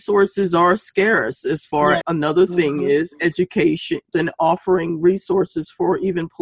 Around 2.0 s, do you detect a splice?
yes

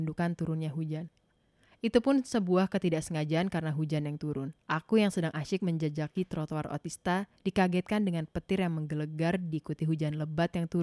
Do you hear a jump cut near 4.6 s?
yes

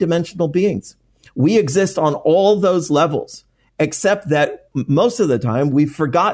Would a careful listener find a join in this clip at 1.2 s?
no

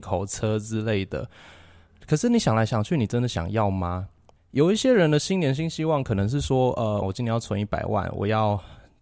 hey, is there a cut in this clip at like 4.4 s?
yes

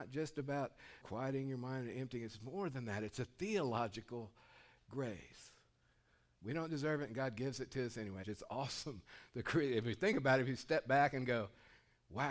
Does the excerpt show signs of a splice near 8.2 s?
yes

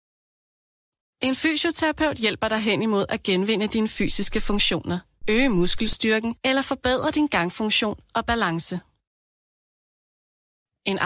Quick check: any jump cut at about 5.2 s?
yes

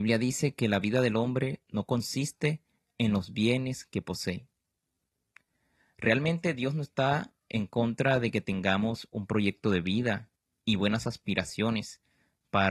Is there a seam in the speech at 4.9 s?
no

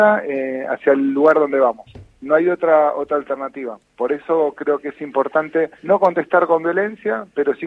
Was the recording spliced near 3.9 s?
no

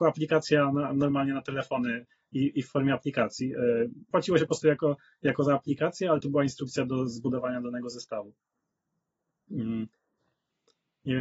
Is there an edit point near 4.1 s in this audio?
yes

